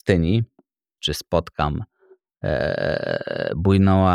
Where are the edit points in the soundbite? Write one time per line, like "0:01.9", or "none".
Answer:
0:01.0